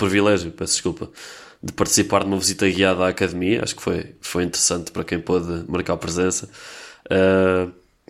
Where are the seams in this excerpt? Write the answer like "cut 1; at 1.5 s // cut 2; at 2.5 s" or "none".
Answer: none